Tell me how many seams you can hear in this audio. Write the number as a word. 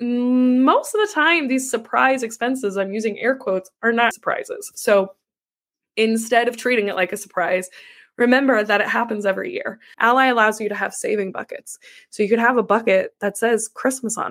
two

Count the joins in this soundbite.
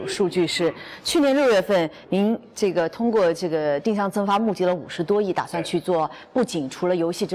zero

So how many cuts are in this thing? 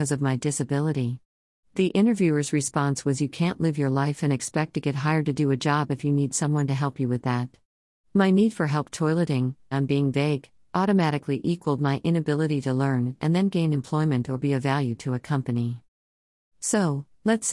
one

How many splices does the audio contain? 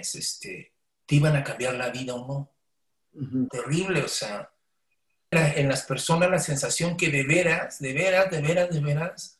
two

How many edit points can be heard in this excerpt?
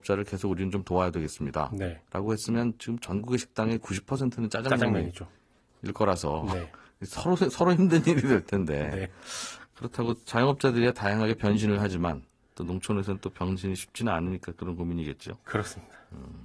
zero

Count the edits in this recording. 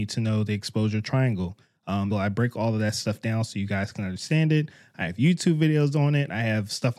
one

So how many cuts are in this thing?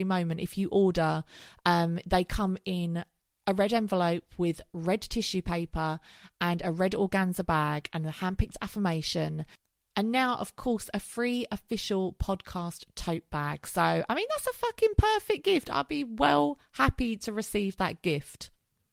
zero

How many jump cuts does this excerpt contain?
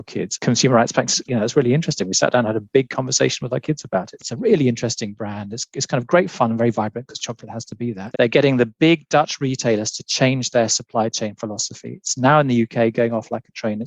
three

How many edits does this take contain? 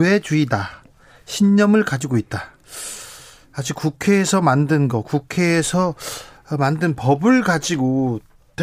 zero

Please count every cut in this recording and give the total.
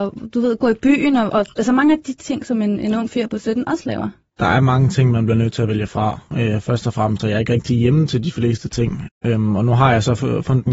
two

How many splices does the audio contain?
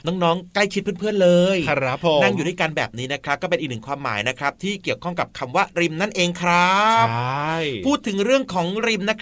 zero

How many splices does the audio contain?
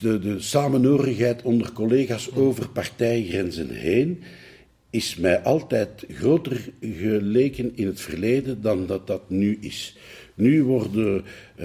zero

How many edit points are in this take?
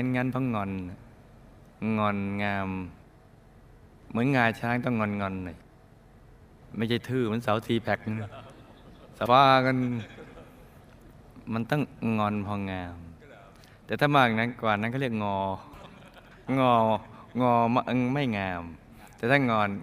one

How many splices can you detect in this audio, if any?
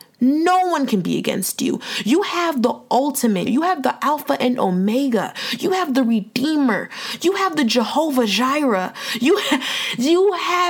one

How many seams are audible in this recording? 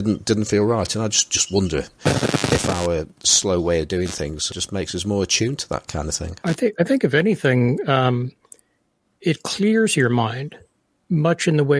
two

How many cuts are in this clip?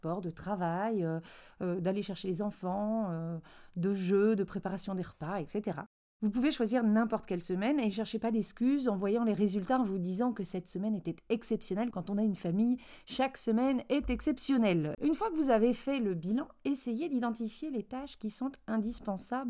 two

